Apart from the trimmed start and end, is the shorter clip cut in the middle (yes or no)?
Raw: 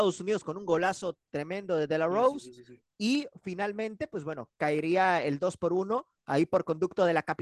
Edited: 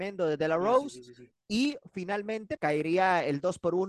yes